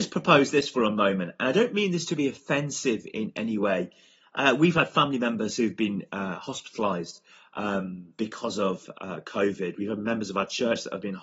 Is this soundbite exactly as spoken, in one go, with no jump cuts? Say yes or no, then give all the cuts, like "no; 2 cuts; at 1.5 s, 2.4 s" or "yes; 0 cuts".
yes; 0 cuts